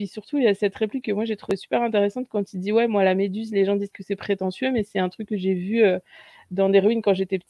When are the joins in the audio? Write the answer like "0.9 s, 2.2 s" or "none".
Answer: none